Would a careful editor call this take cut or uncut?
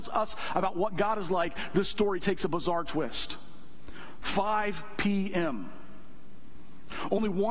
uncut